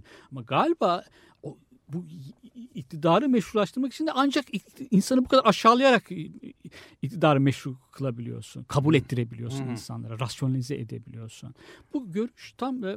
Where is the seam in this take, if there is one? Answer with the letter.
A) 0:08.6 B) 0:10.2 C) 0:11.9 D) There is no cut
D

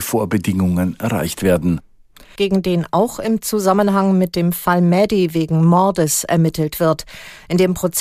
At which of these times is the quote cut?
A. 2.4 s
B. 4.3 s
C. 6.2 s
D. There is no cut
A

